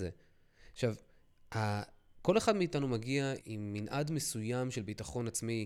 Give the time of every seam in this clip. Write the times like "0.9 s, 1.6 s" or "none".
3.4 s